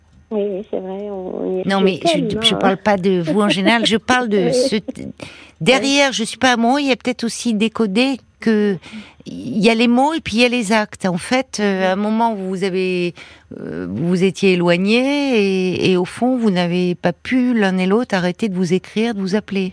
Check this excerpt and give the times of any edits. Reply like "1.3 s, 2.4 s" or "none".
1.6 s